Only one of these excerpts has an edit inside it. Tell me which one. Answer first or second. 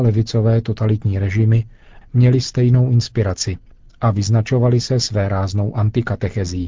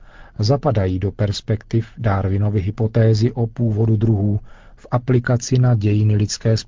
first